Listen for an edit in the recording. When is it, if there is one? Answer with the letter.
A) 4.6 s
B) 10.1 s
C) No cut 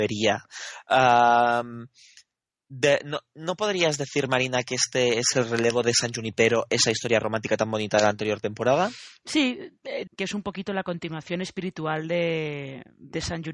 B